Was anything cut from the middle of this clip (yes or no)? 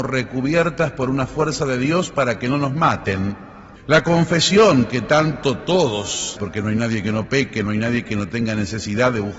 yes